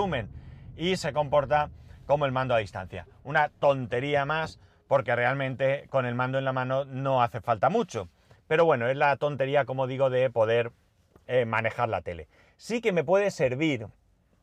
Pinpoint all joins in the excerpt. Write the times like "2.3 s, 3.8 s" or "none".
none